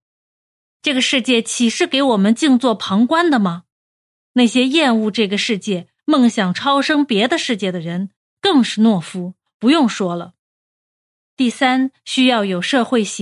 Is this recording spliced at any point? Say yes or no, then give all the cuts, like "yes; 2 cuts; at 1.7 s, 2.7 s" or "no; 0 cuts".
no; 0 cuts